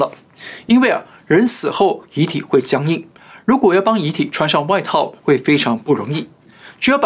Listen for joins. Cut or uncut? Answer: uncut